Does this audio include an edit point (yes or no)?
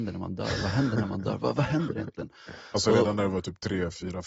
no